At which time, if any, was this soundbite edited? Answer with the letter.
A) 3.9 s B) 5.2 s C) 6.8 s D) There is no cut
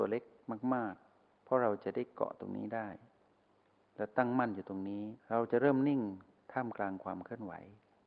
B